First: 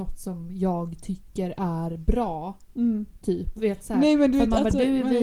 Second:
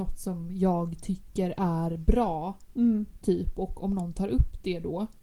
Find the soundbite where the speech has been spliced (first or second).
first